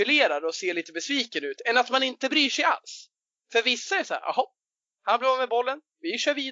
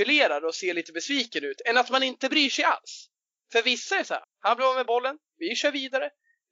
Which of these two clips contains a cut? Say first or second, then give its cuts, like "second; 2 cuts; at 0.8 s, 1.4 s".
second; 1 cut; at 4.2 s